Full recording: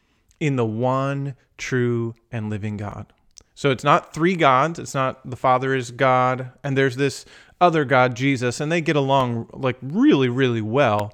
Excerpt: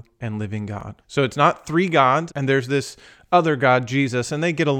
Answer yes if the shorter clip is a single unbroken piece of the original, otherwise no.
no